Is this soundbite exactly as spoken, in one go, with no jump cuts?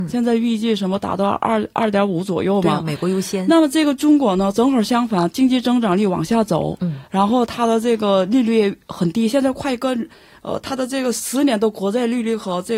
yes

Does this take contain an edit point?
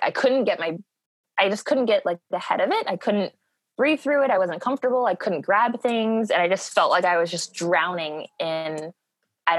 no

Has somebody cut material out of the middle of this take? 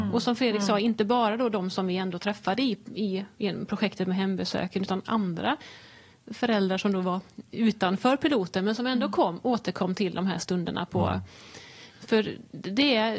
yes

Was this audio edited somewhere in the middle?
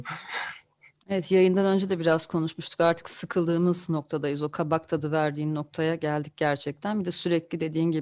no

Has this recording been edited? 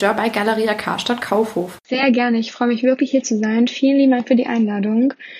yes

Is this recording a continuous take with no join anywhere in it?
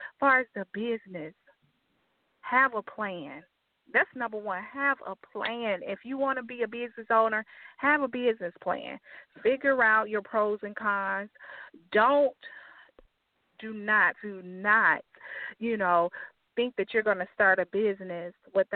no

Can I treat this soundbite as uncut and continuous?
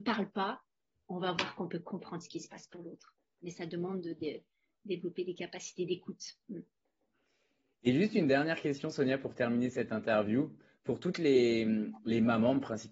yes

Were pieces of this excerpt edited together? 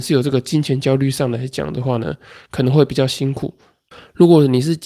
no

